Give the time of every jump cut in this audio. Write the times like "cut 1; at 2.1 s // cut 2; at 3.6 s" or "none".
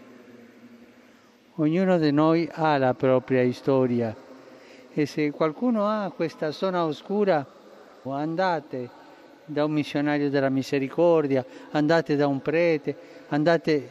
cut 1; at 8.1 s